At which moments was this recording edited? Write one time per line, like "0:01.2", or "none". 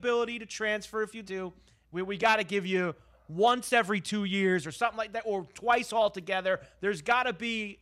0:01.2

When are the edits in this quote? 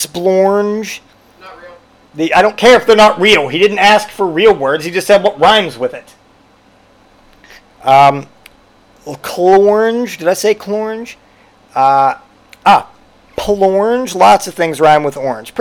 none

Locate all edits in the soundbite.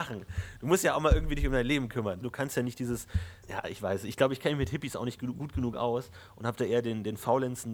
0:02.2
0:03.4

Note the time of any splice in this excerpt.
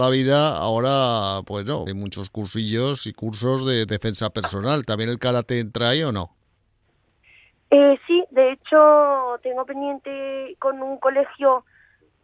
0:01.9

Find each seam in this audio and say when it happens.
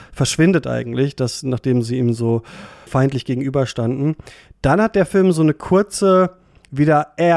0:02.9

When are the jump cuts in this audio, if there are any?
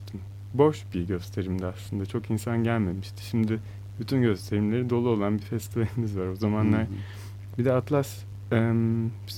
0:07.5

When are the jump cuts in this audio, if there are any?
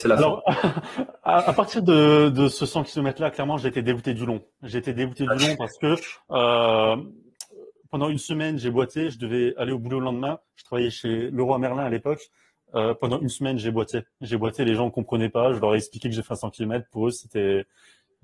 none

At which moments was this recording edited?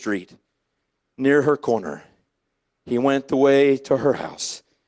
none

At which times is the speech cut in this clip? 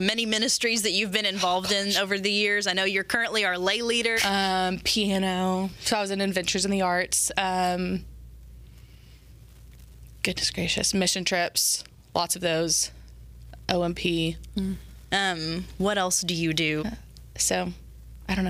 0:04.2
0:15.1
0:16.8

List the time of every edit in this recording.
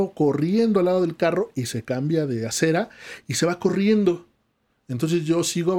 none

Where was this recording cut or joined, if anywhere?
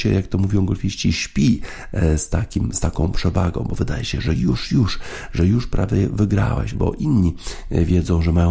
0:06.7

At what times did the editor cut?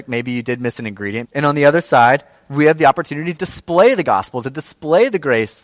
0:01.2
0:03.4

